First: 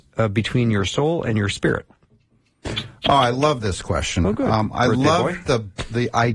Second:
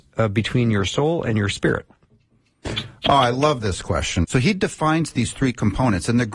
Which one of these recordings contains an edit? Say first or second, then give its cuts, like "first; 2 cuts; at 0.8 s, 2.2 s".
second; 1 cut; at 4.2 s